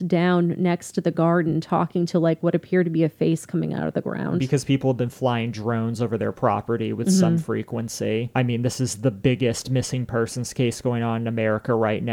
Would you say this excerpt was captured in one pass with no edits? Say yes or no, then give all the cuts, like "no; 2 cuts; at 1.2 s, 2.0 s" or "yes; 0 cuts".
yes; 0 cuts